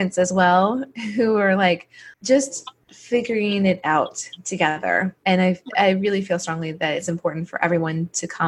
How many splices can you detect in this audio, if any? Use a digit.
2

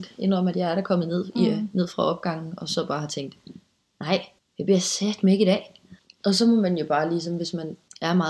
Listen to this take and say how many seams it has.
0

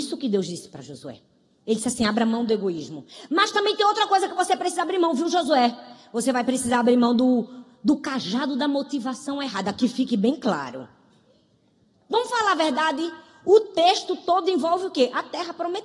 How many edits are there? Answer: 0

